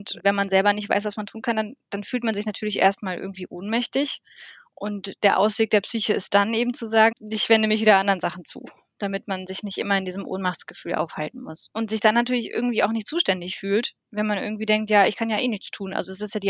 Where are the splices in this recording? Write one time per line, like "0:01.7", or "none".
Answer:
0:07.1
0:11.7